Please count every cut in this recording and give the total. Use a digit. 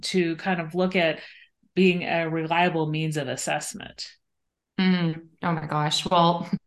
0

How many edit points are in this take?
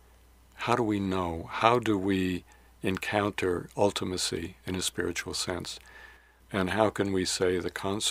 1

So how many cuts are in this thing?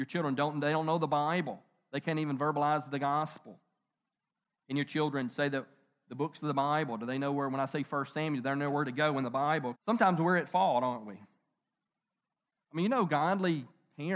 2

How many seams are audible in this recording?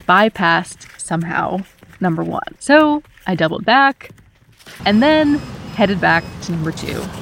2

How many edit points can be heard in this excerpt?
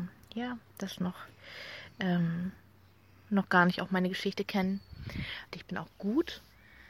1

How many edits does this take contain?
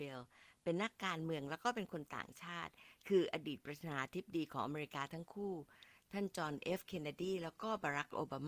0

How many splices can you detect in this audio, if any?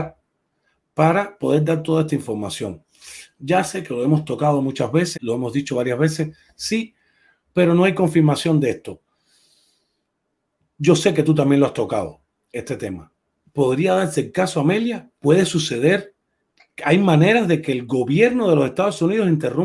1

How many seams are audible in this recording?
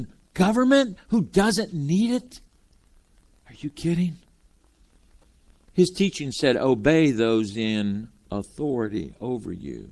0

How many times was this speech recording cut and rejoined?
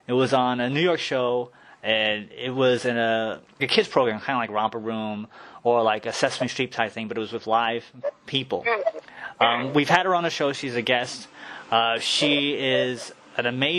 1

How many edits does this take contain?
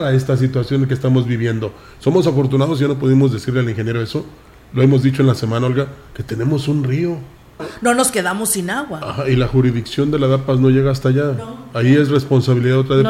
1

